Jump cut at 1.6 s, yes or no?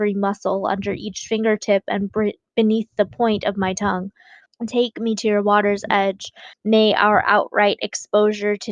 no